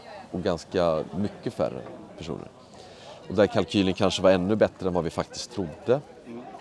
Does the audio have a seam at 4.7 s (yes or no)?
no